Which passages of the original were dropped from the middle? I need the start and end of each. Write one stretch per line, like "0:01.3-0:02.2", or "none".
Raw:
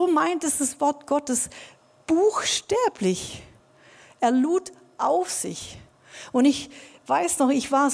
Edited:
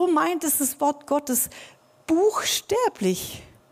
none